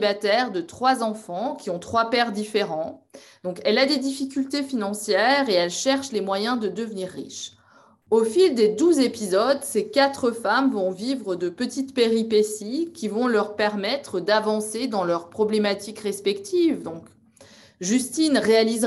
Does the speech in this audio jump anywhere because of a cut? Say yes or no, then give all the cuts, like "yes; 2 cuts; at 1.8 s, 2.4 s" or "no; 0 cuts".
no; 0 cuts